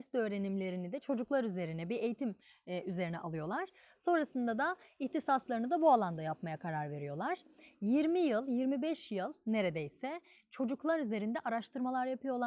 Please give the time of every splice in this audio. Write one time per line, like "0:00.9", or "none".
none